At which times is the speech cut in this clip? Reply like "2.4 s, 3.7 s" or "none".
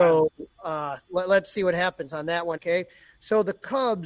2.6 s

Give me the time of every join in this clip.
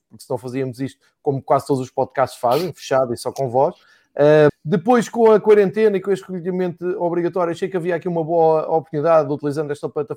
4.5 s

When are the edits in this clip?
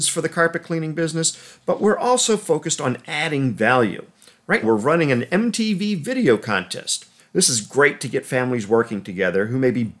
4.6 s, 7.2 s

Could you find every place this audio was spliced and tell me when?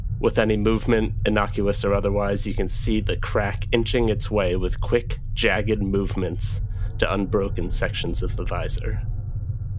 none

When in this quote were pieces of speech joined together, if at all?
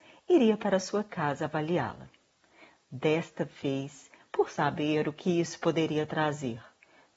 4.2 s

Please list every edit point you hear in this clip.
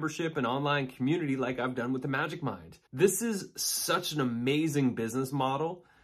2.9 s

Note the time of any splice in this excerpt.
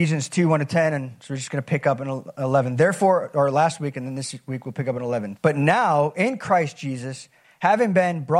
5.4 s, 7.4 s

